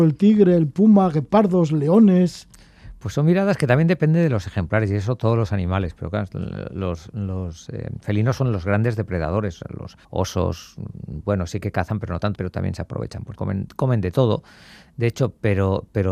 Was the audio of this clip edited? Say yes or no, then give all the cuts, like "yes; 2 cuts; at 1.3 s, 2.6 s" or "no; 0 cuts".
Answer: yes; 3 cuts; at 10.0 s, 12.3 s, 13.3 s